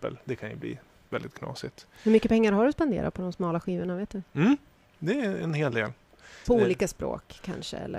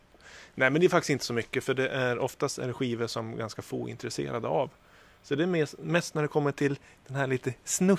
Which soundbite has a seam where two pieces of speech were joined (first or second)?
first